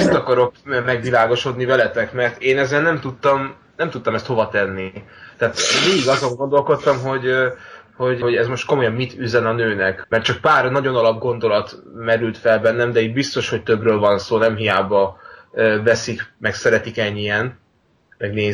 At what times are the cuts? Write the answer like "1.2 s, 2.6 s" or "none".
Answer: 8.2 s, 10.0 s